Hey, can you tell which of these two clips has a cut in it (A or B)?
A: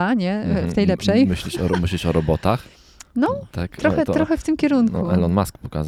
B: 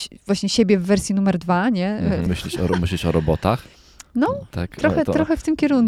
B